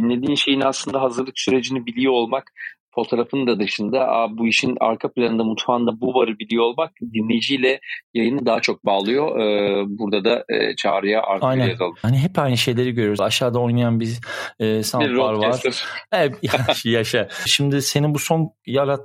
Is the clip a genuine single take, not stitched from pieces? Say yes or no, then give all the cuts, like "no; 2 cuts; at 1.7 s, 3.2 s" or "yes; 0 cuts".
no; 3 cuts; at 12.0 s, 13.2 s, 17.5 s